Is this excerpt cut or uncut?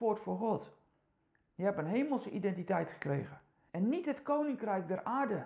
cut